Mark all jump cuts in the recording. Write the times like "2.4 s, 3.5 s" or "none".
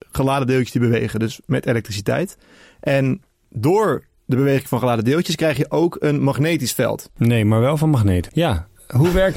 7.1 s, 8.3 s